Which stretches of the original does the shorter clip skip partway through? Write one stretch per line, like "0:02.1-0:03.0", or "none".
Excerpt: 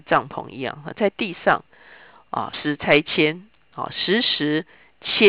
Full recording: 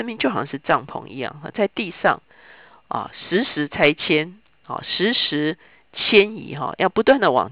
0:03.1-0:03.4